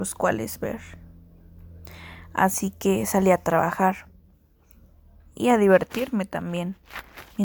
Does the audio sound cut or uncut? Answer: uncut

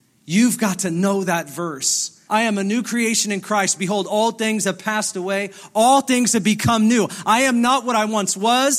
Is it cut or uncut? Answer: cut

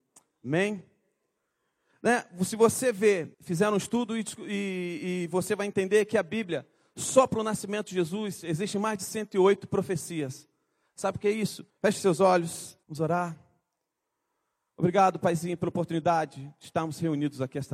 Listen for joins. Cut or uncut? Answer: cut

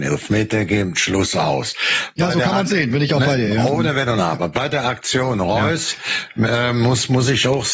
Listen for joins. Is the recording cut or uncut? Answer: uncut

